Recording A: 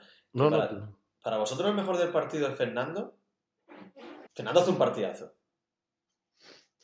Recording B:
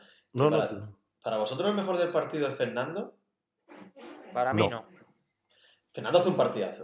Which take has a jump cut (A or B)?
A